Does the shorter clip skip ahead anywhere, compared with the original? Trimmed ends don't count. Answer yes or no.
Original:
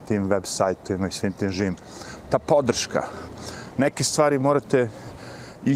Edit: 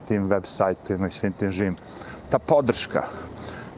no